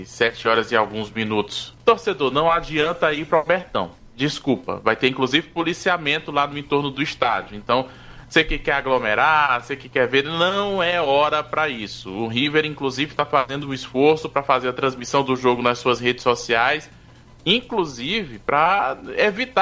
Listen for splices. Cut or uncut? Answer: cut